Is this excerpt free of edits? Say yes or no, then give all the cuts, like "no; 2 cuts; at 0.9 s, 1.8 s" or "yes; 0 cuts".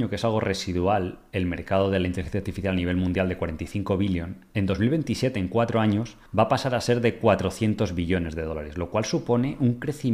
no; 1 cut; at 6.3 s